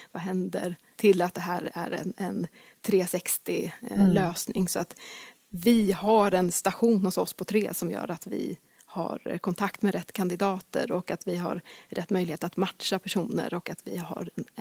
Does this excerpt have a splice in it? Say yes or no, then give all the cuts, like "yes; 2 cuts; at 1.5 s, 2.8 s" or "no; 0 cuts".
yes; 1 cut; at 0.9 s